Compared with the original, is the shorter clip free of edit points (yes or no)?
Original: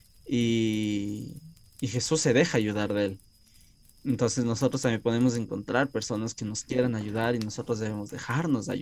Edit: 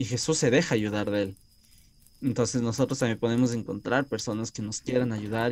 yes